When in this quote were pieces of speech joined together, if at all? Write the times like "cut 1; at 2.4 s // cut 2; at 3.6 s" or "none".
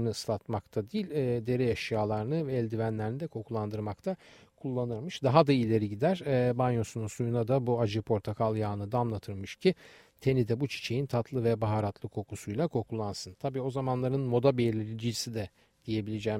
none